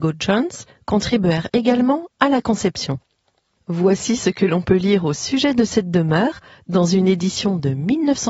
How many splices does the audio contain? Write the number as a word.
zero